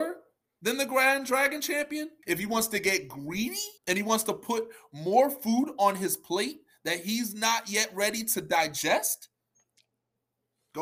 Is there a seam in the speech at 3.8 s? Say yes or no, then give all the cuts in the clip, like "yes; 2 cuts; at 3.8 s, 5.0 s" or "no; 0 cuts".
yes; 2 cuts; at 2.2 s, 3.8 s